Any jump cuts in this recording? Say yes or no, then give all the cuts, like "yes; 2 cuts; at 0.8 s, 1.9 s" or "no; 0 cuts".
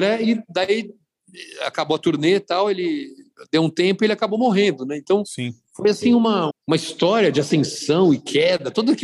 yes; 1 cut; at 6.5 s